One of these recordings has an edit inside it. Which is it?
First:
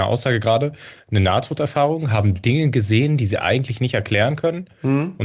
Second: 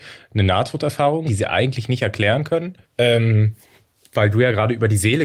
second; 2 cuts; at 1.3 s, 2.8 s

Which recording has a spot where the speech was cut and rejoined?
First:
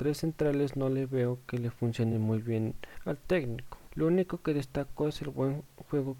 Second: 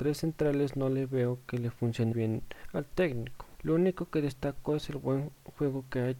second; 1 cut; at 2.1 s

